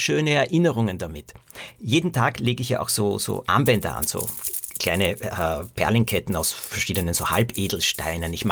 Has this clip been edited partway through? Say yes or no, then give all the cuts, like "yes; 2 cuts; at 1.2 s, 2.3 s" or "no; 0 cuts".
no; 0 cuts